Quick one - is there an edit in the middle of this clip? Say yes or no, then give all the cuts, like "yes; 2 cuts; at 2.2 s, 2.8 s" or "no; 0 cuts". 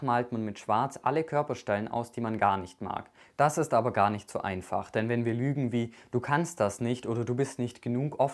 yes; 1 cut; at 3.3 s